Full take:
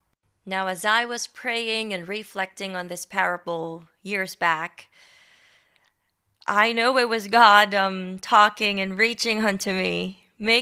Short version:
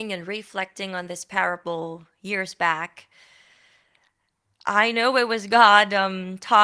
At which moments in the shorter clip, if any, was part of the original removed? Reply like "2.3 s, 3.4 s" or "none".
none